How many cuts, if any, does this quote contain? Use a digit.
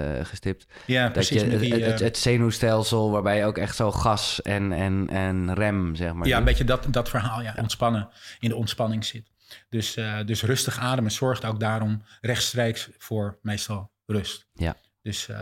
1